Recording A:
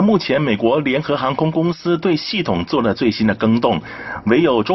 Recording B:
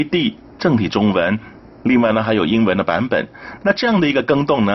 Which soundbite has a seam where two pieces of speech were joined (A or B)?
B